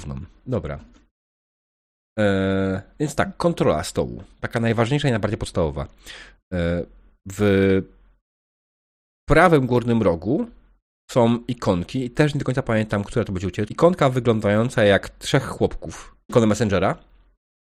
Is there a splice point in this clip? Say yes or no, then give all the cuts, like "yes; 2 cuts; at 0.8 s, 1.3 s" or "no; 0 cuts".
yes; 2 cuts; at 13.7 s, 16.3 s